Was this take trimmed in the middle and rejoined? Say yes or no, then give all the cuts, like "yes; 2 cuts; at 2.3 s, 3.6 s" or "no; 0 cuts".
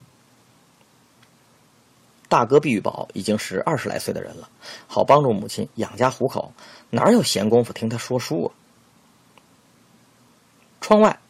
yes; 1 cut; at 4.8 s